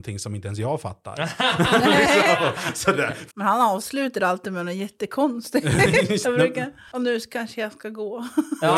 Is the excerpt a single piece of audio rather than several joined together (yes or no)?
no